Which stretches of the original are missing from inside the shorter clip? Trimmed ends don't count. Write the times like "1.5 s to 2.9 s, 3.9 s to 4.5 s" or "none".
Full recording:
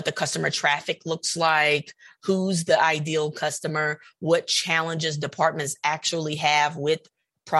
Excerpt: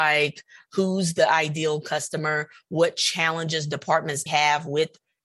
5.8 s to 6.4 s